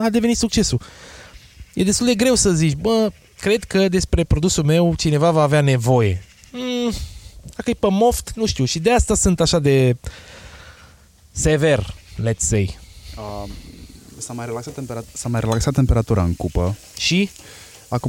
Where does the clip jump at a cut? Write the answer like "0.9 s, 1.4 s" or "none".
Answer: none

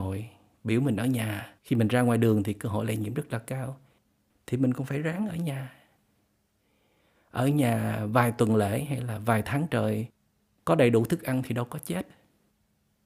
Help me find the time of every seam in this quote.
1.6 s

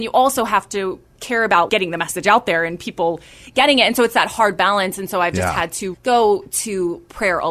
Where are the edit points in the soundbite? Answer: 1.7 s, 5.9 s

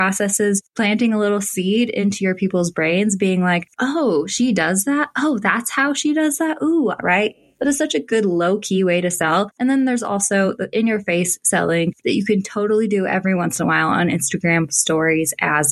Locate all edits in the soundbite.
7.0 s

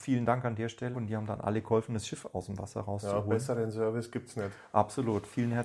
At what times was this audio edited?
0.9 s

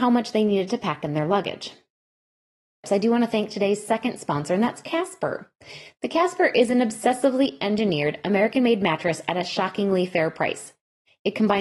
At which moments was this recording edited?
2.8 s

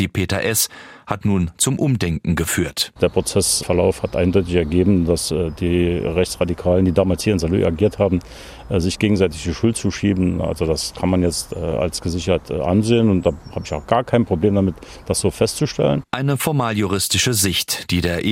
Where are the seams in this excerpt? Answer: none

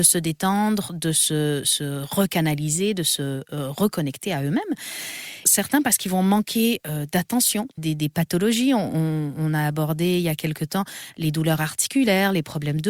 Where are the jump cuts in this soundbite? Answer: 5.4 s, 7.8 s

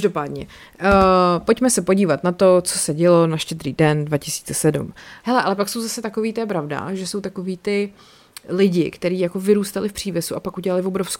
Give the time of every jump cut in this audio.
5.2 s

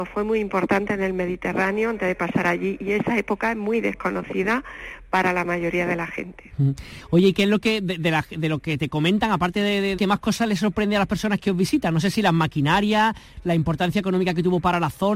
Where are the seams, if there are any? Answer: 10.0 s

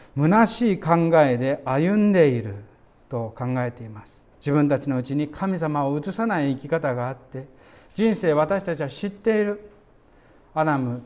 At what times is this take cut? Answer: 4.3 s

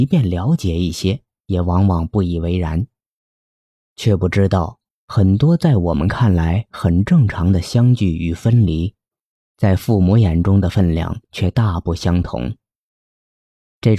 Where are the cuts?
none

